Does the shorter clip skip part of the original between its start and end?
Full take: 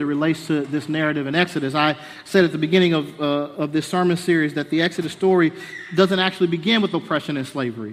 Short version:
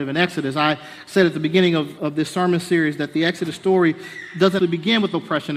yes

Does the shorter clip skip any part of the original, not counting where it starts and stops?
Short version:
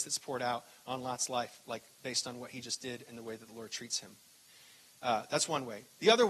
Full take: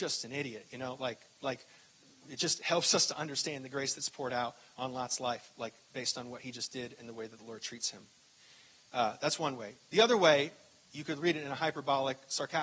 no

